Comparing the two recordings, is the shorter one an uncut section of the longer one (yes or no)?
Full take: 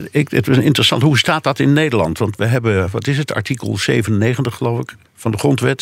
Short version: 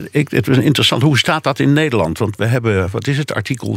yes